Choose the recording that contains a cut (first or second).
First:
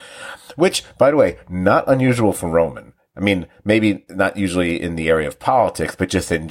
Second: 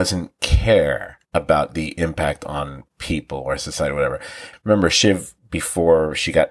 second